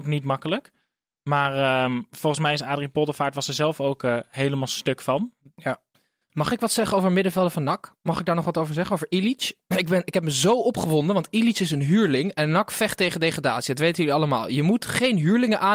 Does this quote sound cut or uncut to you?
uncut